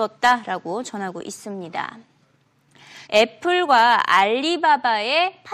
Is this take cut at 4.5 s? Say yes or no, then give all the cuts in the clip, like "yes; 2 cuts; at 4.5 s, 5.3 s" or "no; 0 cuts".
no; 1 cut; at 3.1 s